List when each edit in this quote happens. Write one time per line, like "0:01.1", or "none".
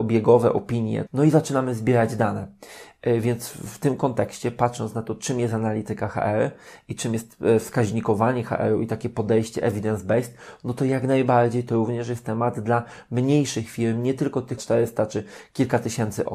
0:01.1
0:14.6